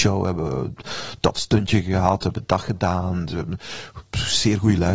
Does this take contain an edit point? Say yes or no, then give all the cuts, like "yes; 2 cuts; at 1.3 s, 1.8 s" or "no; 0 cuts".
no; 0 cuts